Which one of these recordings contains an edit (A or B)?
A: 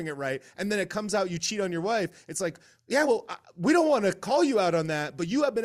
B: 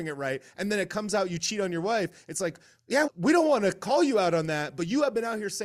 B